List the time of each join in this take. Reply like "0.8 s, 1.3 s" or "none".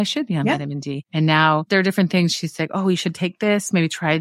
none